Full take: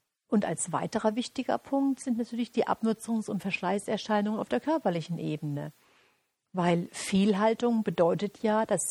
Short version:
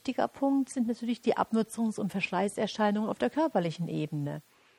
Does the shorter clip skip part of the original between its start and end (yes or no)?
no